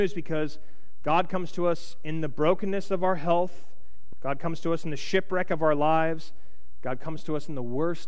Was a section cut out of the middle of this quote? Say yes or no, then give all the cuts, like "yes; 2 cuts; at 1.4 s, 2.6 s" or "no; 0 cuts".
no; 0 cuts